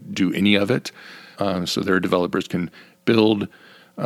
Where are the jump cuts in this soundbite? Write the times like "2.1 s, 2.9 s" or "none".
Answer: 1.3 s